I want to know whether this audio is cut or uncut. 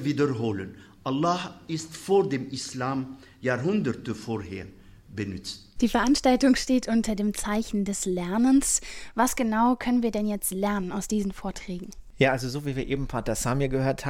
uncut